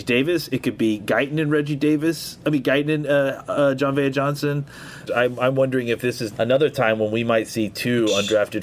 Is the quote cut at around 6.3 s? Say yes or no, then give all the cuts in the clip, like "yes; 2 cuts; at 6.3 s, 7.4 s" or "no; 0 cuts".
yes; 2 cuts; at 5.1 s, 6.3 s